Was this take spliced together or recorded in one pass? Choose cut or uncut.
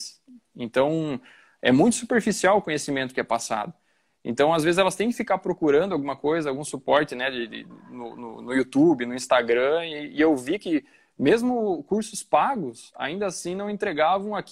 uncut